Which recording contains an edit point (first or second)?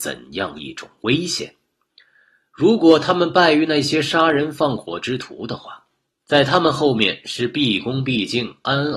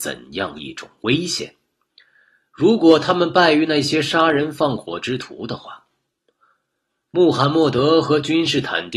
first